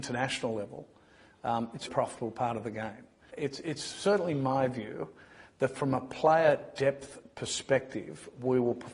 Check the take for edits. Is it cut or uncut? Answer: cut